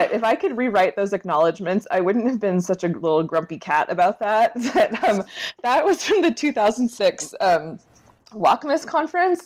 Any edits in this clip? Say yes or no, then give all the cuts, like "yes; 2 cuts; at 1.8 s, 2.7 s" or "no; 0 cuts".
no; 0 cuts